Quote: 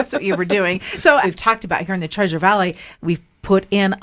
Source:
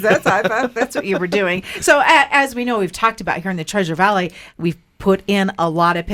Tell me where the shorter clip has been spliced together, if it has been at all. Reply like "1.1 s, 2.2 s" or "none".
1.2 s